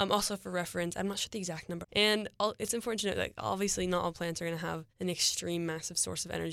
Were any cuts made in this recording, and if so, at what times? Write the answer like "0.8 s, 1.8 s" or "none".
1.8 s, 4.9 s